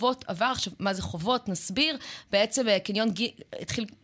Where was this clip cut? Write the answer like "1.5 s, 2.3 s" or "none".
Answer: none